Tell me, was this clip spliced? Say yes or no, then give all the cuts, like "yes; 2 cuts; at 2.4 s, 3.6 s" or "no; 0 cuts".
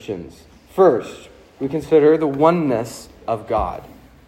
no; 0 cuts